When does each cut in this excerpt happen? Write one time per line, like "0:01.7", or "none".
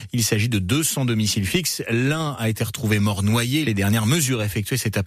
0:03.6